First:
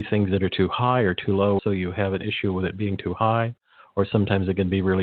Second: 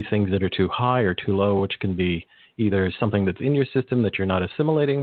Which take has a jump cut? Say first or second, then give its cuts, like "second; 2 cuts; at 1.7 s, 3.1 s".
first; 1 cut; at 1.6 s